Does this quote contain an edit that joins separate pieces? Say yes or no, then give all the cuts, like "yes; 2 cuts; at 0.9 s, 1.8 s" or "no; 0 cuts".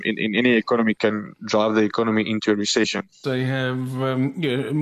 yes; 1 cut; at 3.2 s